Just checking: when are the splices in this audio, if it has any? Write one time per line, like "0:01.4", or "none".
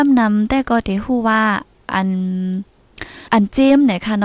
0:03.3